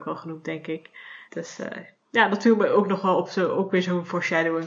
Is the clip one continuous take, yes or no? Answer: no